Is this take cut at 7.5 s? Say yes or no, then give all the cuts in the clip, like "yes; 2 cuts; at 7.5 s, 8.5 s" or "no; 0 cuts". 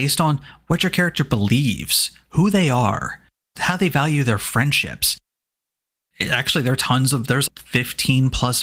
yes; 1 cut; at 7.5 s